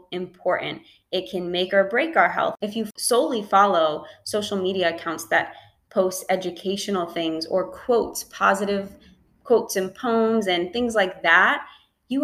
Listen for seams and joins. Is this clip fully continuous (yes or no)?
yes